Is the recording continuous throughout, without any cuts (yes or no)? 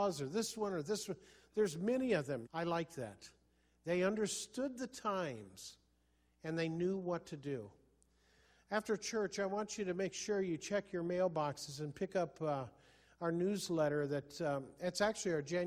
no